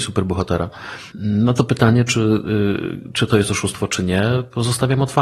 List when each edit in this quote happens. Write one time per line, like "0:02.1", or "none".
0:01.1